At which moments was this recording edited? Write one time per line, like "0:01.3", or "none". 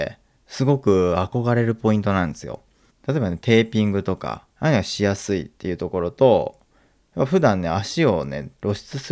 0:02.9
0:04.5